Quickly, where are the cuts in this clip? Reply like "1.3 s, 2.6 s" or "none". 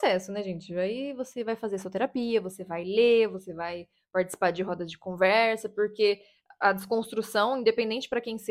none